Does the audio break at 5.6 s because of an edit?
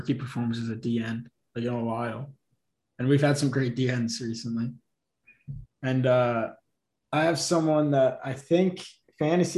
yes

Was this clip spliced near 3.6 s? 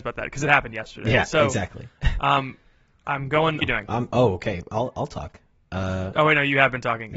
yes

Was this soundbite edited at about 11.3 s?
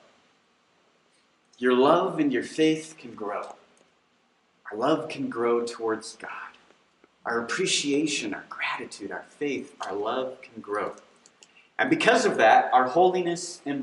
no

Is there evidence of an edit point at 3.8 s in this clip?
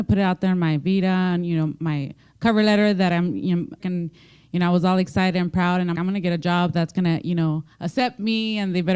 yes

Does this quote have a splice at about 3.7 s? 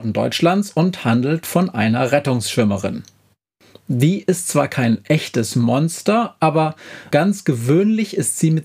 no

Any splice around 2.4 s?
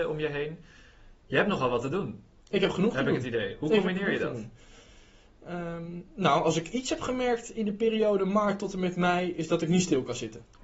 no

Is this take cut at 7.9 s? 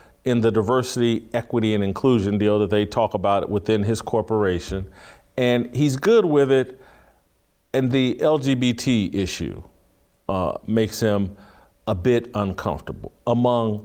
yes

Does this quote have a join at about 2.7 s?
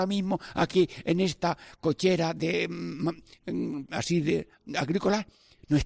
no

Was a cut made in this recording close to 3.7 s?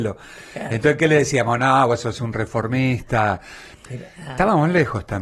yes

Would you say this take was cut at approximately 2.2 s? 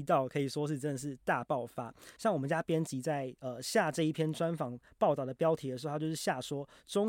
yes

